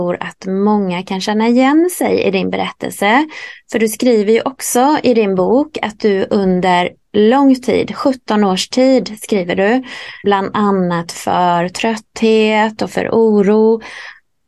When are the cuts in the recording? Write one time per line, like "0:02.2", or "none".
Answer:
0:10.2